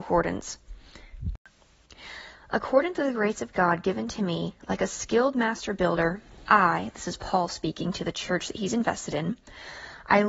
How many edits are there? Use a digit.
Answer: 1